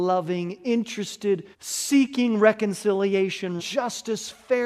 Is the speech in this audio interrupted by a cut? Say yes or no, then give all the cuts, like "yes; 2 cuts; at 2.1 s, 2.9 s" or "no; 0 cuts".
yes; 2 cuts; at 1.5 s, 3.6 s